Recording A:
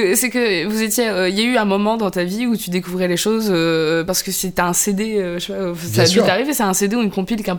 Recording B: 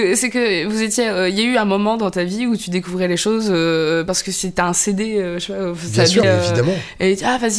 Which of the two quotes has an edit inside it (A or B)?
B